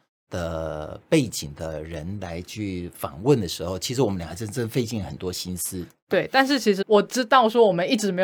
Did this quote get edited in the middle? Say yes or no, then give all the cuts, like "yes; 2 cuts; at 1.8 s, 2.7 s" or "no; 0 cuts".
yes; 1 cut; at 6.8 s